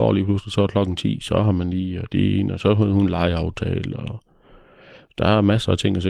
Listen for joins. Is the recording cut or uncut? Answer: uncut